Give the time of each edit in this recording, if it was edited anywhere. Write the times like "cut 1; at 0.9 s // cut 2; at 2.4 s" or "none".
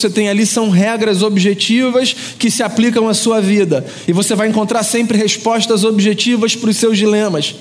none